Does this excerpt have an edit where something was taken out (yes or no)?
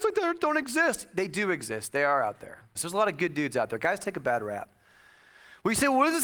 yes